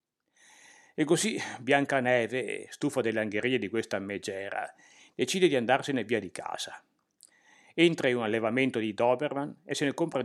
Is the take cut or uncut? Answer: uncut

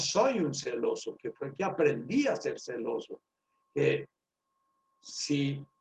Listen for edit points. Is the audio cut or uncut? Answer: cut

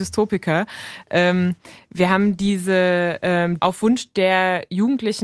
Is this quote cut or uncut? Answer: cut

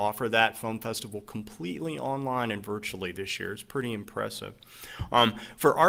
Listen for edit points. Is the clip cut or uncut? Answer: uncut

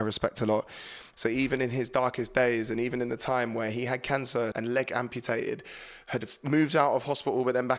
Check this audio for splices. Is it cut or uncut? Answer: cut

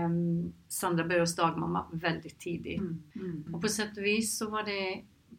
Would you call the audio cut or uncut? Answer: cut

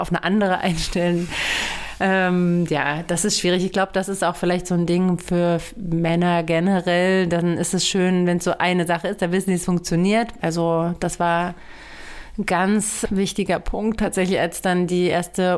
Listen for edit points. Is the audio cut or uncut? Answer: cut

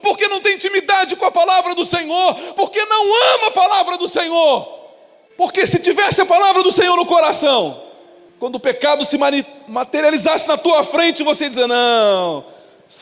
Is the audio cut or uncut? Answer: uncut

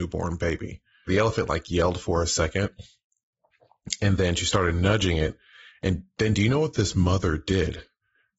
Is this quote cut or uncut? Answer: cut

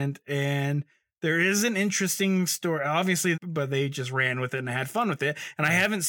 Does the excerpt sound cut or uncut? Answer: cut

